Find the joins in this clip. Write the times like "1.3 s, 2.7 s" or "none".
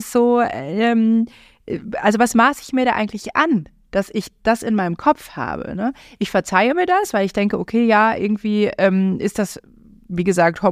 none